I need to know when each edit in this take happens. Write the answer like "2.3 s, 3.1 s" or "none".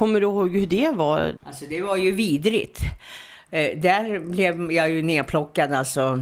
1.4 s